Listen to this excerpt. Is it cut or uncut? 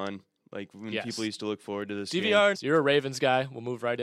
cut